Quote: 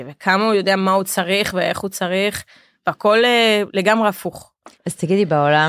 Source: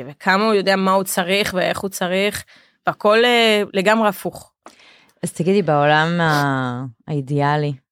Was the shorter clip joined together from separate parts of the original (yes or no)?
yes